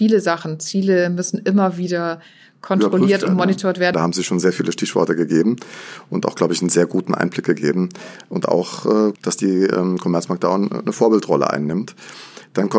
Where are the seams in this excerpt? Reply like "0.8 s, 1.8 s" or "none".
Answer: 3.9 s, 9.1 s